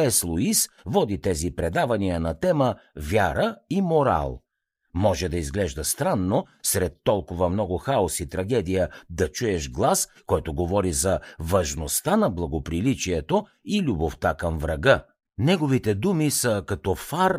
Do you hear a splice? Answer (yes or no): yes